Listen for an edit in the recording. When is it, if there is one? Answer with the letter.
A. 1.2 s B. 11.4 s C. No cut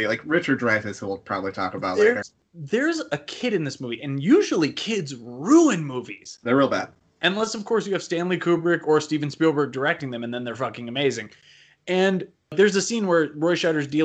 C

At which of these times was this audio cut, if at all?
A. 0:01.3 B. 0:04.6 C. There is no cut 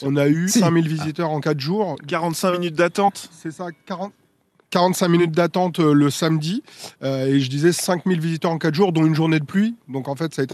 C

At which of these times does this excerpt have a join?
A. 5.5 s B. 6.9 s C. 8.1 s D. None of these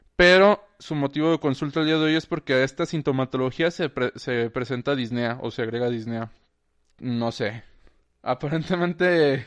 B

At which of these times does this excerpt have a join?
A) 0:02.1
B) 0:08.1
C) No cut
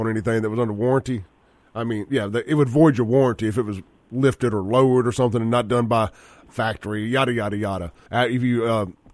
B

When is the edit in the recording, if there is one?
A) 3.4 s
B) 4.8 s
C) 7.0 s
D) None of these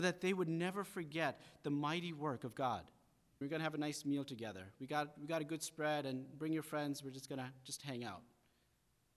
A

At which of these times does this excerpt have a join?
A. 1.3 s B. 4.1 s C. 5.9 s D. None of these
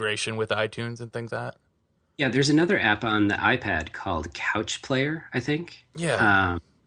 A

